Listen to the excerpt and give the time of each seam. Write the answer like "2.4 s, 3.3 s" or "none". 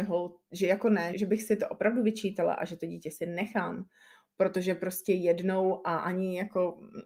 1.1 s